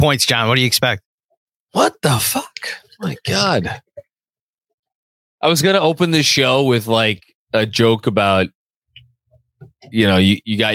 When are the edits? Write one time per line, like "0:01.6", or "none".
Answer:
none